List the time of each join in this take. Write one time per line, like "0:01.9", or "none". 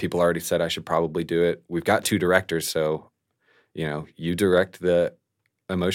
none